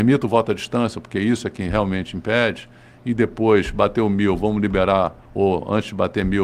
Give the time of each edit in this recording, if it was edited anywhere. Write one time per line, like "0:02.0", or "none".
none